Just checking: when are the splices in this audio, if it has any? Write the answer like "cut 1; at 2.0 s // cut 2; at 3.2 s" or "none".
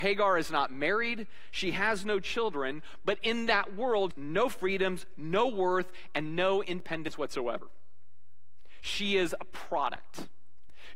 cut 1; at 4.1 s